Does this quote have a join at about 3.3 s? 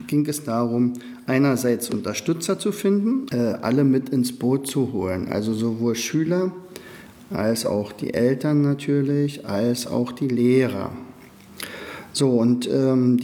yes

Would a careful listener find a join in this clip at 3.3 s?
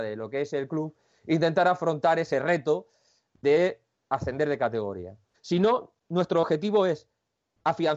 no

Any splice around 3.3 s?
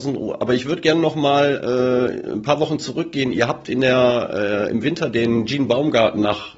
no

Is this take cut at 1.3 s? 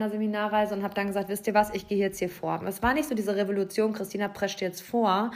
no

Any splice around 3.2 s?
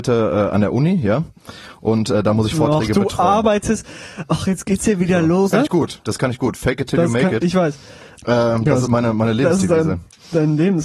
no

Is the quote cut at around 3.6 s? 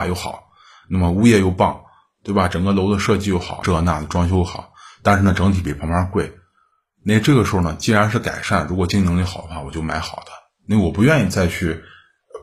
yes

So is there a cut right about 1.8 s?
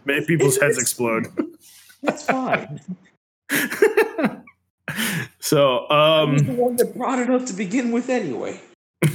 no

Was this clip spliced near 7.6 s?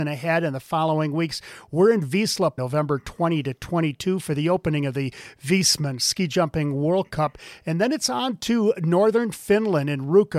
no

